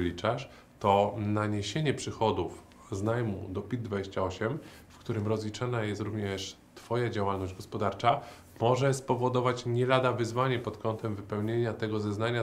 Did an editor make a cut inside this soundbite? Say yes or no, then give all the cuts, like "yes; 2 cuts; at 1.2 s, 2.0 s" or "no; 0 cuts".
no; 0 cuts